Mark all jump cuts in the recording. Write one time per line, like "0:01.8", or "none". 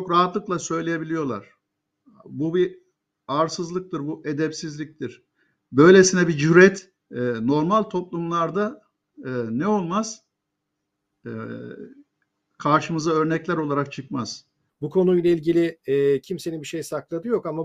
0:07.0
0:14.7